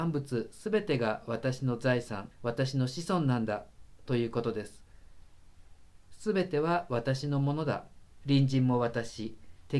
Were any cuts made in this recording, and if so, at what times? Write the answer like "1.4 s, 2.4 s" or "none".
2.3 s, 8.2 s